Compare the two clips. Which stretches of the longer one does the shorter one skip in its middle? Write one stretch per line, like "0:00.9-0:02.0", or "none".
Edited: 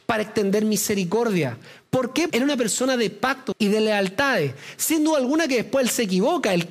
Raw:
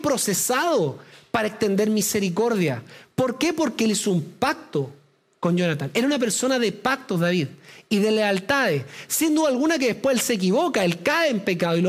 0:03.5-0:05.9
0:07.1-0:07.8